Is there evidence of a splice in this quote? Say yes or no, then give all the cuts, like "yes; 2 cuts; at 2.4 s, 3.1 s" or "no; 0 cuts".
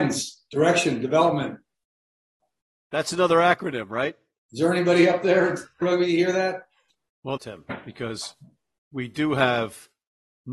yes; 2 cuts; at 5.8 s, 7.4 s